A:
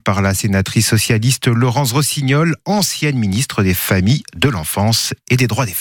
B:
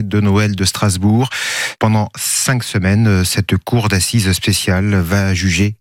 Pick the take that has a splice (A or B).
B